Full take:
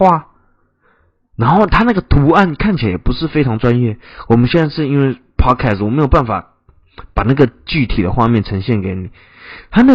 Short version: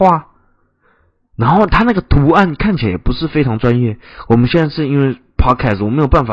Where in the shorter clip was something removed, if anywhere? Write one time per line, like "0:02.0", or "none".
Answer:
none